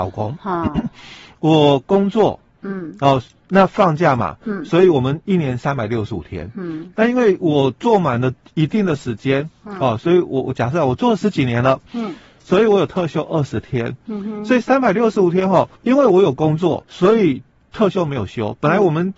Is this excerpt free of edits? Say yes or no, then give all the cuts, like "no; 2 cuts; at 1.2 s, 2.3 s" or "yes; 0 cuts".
no; 2 cuts; at 15.8 s, 16.8 s